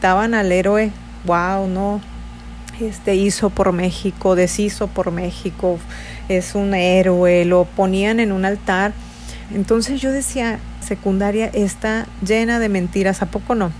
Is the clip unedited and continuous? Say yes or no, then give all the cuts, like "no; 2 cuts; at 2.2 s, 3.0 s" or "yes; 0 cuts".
no; 2 cuts; at 9.5 s, 10.8 s